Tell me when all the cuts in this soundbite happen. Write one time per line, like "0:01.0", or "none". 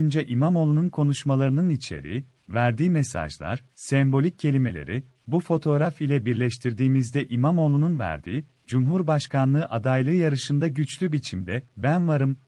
none